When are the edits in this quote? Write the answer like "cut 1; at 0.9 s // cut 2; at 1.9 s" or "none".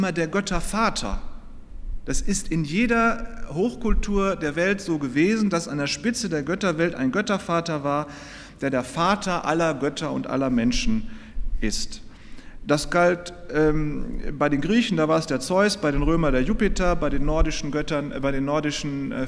none